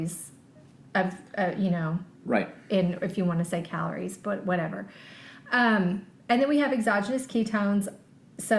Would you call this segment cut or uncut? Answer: uncut